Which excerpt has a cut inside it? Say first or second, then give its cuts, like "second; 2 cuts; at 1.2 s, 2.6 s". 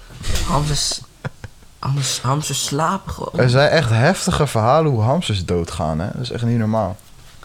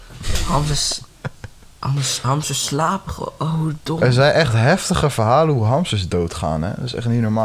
first; 1 cut; at 3.3 s